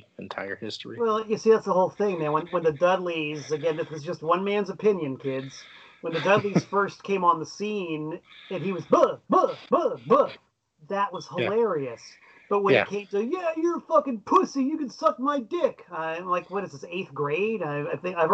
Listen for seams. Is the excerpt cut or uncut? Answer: uncut